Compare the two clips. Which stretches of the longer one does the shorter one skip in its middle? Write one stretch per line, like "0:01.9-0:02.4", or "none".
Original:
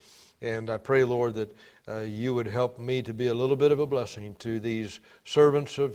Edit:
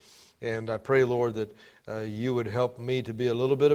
none